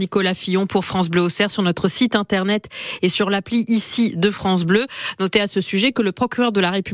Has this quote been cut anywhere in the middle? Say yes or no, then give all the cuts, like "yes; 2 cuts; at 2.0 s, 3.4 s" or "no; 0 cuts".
no; 0 cuts